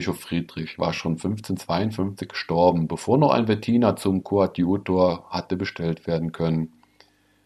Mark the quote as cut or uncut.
uncut